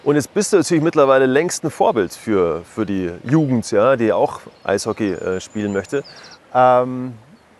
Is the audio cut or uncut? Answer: cut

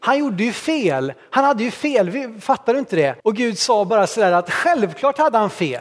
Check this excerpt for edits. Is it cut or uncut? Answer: cut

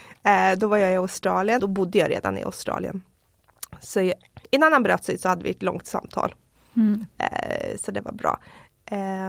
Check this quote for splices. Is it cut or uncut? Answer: cut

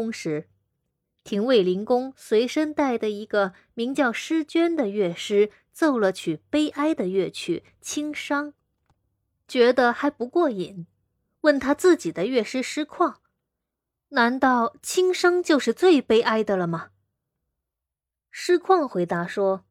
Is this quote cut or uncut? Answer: uncut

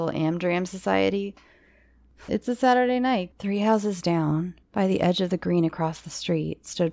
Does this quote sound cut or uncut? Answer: cut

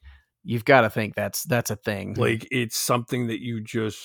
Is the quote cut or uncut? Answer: cut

